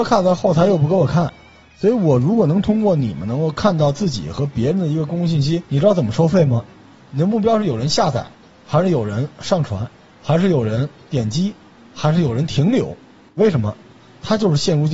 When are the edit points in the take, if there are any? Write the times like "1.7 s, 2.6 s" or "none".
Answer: 7.0 s, 13.4 s